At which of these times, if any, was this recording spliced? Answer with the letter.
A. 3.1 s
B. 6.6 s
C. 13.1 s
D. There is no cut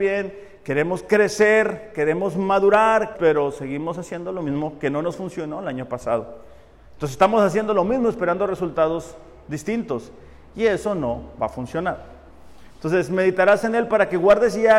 A